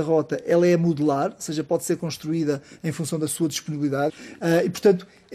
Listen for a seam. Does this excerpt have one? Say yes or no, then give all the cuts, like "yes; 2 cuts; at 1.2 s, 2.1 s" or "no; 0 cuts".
yes; 1 cut; at 4.1 s